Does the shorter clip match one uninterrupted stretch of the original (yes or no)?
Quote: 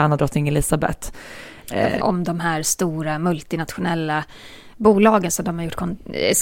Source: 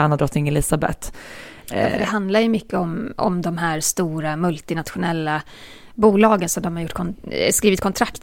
no